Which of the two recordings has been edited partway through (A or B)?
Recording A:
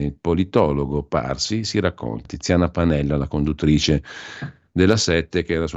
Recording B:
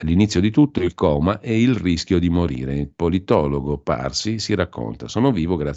A